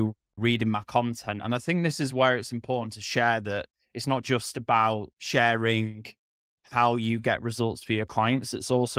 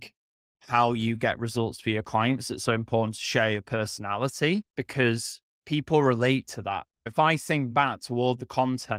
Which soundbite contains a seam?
second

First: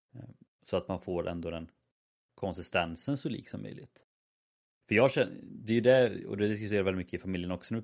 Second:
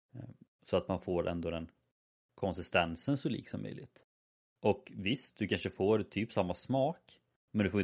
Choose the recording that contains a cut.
second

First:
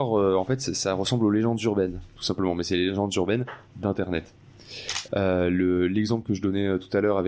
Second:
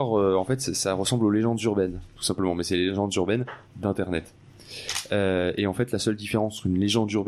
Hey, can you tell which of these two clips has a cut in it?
first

